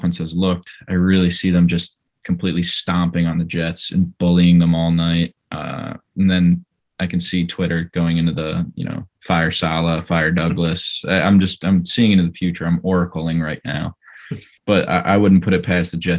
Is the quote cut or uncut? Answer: cut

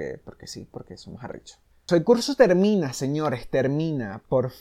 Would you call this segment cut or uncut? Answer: cut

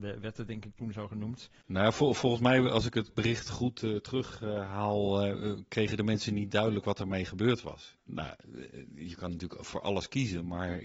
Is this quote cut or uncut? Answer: uncut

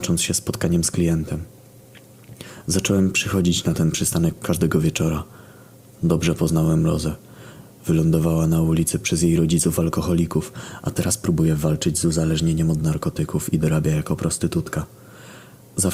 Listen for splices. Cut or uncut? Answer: uncut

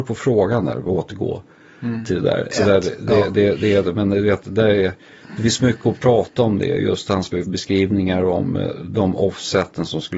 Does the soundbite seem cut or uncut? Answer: cut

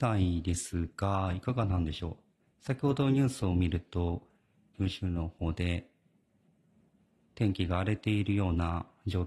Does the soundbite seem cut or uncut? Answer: cut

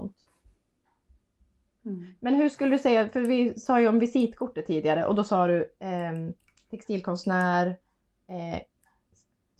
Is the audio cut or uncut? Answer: uncut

